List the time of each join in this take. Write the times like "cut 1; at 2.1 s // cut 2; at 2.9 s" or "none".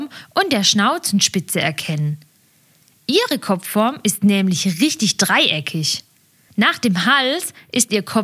cut 1; at 6.5 s